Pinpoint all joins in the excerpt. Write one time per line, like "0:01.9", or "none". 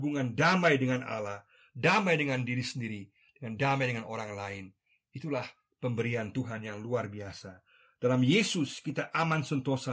none